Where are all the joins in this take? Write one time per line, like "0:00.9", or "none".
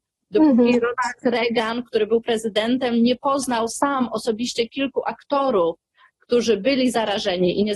none